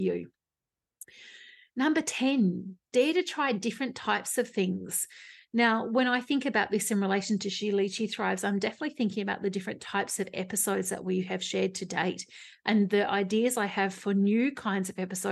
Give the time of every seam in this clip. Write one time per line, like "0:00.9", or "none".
none

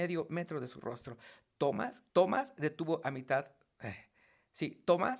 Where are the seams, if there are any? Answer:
0:02.1

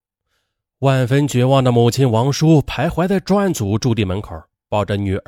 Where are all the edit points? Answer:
none

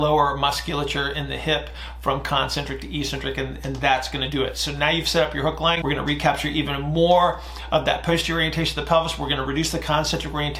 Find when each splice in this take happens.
0:05.8

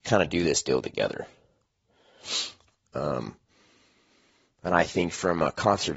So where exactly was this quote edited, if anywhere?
0:02.8

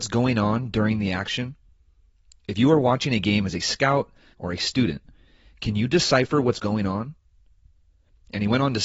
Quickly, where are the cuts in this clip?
0:04.3

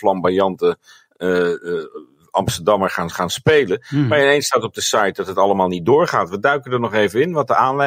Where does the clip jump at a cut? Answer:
none

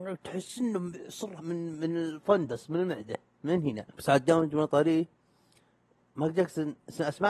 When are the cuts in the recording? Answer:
0:01.4
0:03.9

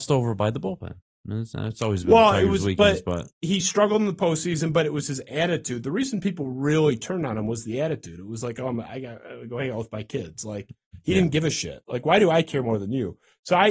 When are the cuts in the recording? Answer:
none

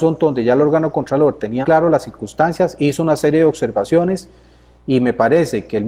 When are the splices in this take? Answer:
0:01.6

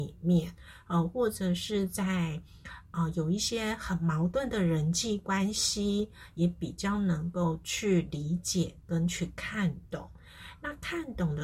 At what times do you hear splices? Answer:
none

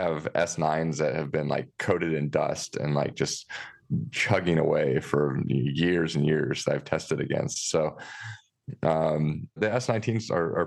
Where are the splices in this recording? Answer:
0:09.6

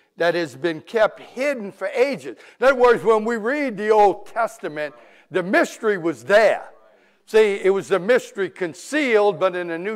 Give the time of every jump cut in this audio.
none

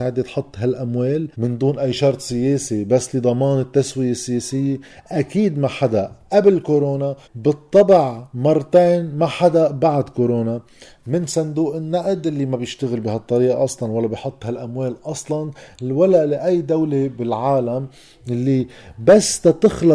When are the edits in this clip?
0:01.3
0:07.2

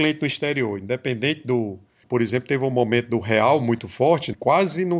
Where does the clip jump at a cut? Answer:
0:02.0

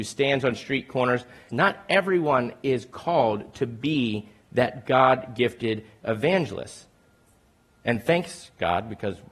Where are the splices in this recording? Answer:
0:01.5

